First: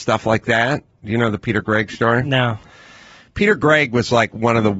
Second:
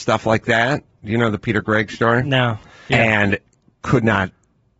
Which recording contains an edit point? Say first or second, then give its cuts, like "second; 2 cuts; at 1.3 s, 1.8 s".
second; 1 cut; at 2.9 s